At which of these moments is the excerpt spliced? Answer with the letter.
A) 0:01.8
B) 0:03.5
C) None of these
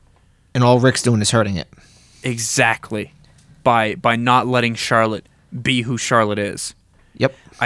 C